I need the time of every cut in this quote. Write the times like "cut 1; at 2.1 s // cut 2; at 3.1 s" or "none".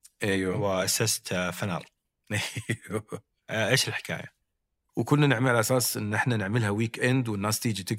cut 1; at 4.9 s